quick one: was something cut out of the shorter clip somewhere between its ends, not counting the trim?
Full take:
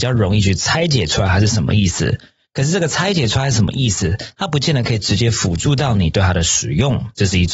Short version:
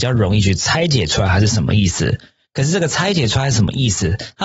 no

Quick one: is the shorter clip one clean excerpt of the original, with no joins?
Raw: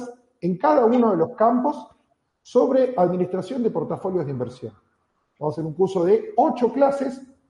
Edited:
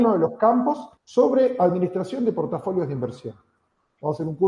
no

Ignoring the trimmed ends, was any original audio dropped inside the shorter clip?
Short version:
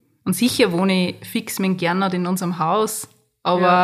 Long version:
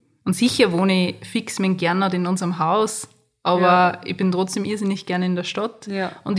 no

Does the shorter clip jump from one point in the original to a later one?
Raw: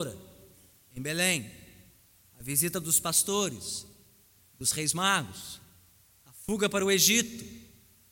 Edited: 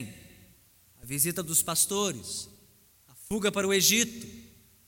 yes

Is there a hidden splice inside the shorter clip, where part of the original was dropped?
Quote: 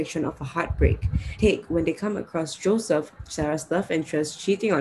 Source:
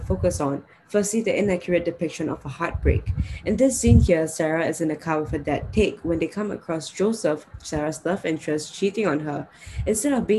yes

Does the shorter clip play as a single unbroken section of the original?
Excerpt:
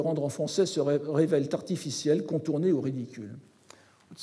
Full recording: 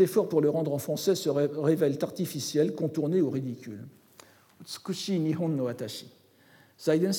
yes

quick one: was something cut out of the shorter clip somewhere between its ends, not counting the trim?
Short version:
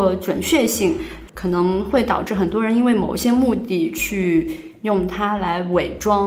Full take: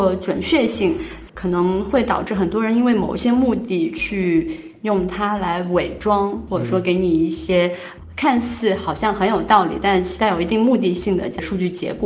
no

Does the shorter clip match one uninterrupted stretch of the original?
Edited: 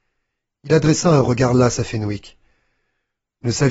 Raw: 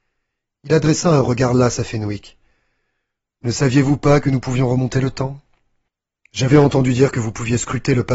yes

